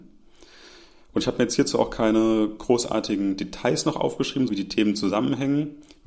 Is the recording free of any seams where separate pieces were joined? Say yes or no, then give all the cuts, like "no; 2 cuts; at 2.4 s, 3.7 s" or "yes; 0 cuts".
no; 1 cut; at 4.5 s